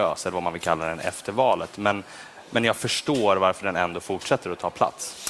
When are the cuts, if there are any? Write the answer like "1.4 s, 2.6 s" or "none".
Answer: none